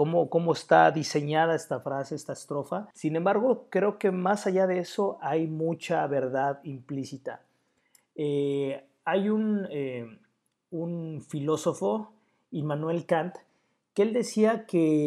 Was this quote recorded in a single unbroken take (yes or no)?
no